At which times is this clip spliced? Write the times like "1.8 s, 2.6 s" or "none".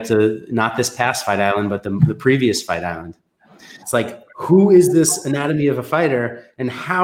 3.8 s